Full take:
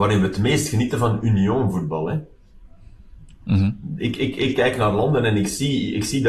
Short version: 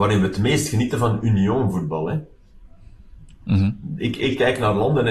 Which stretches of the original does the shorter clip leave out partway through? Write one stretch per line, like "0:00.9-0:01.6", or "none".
0:04.2-0:04.4